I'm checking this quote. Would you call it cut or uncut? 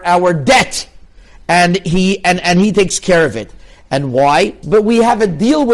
cut